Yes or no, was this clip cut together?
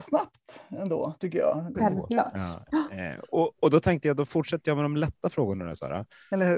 yes